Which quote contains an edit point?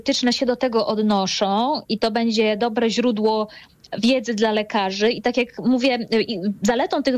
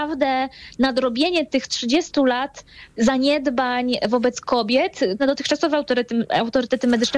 second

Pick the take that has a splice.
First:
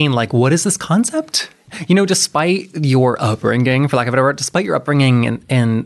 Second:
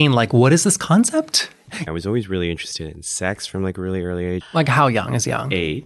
second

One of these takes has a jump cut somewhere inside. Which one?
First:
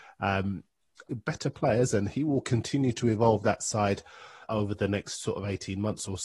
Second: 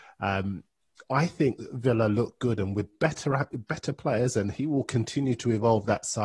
first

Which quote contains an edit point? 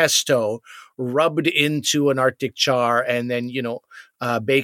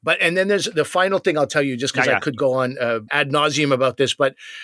second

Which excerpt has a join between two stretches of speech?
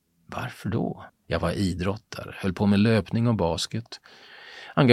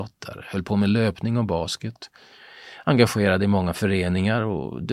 first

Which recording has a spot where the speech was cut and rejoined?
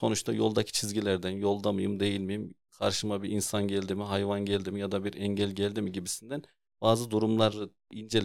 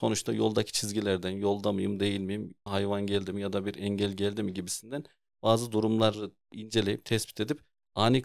second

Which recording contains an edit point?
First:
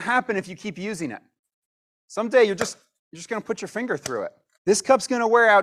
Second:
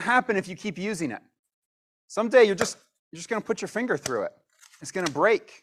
first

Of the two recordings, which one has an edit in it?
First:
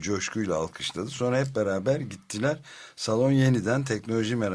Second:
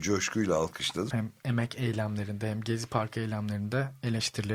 second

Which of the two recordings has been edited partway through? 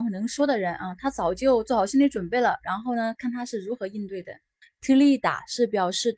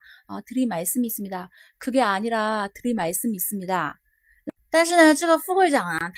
first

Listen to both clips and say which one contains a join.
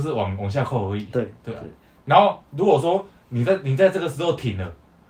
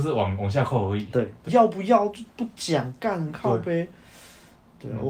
second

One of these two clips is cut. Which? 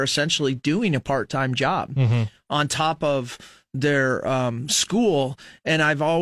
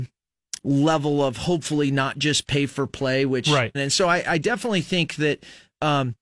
second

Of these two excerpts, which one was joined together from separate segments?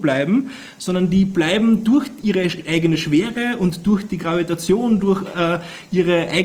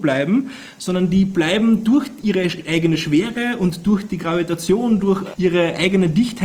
second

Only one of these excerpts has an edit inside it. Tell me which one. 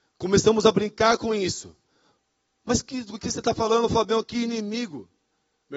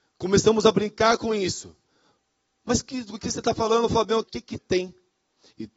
second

